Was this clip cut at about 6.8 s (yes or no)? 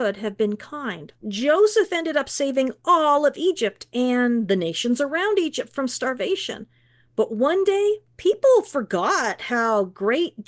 no